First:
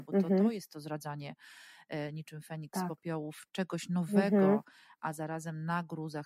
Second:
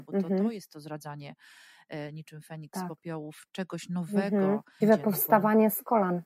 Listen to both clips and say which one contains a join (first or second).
second